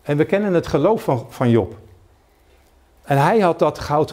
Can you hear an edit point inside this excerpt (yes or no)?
no